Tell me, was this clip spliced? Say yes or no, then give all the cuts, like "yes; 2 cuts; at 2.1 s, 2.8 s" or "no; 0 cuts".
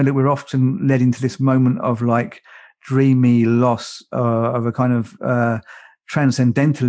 no; 0 cuts